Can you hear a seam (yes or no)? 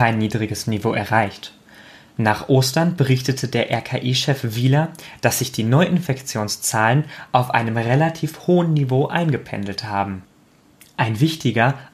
no